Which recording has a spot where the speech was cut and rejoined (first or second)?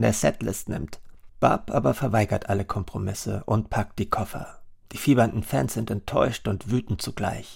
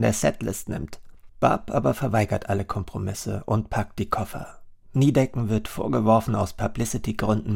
second